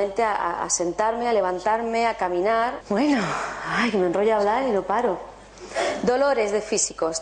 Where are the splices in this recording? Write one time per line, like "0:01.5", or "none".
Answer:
0:02.8